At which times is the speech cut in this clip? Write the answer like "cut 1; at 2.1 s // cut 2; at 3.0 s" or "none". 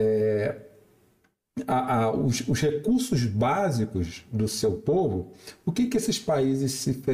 none